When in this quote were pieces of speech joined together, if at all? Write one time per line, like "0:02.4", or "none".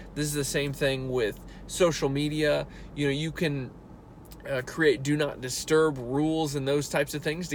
none